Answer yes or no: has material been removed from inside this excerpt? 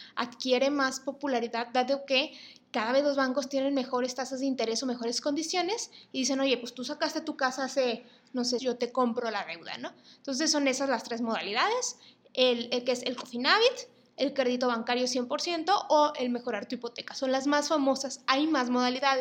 yes